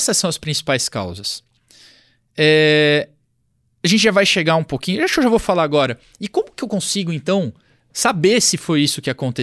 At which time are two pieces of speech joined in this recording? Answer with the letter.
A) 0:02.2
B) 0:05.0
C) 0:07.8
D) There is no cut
D